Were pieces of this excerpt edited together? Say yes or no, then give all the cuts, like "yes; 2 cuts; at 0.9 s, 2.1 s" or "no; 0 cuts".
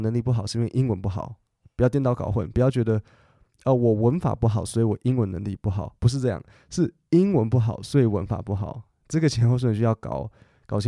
no; 0 cuts